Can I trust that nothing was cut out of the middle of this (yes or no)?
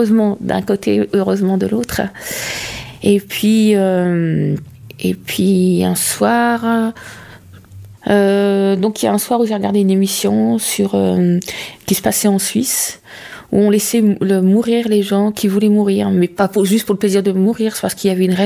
yes